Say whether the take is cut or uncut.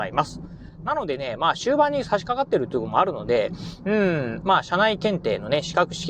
cut